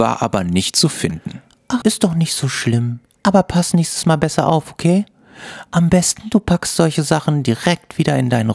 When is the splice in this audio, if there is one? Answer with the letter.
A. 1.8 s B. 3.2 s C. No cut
A